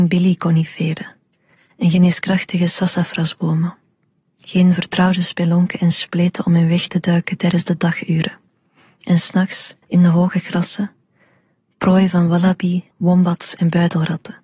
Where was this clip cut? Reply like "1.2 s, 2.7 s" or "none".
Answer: 9.8 s, 12.9 s